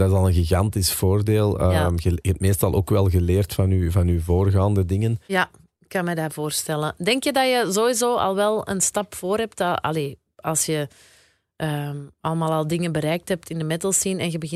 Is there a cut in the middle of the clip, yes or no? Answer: yes